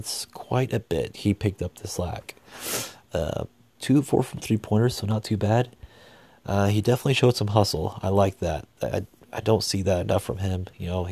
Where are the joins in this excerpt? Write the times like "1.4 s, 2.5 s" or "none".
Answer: 1.1 s, 3.7 s